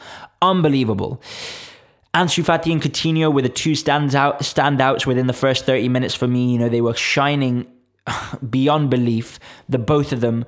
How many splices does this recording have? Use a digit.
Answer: 0